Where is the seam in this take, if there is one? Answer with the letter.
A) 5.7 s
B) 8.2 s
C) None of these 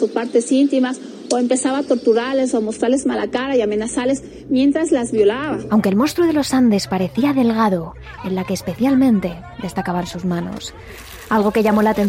B